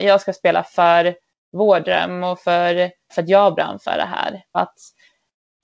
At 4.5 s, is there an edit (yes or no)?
yes